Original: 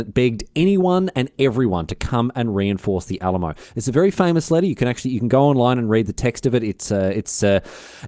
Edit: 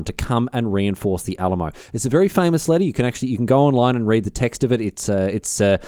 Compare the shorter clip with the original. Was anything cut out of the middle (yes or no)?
no